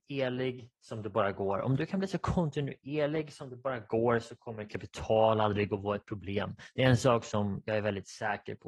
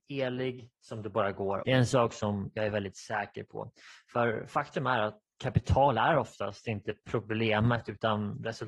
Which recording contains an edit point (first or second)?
second